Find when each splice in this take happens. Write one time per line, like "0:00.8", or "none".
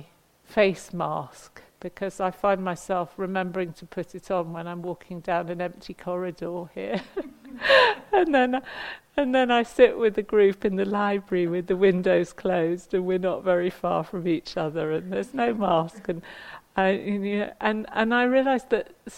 none